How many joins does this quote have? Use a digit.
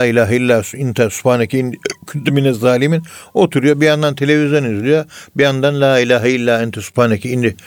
0